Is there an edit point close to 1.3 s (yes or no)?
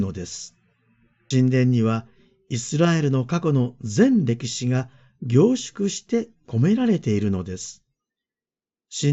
yes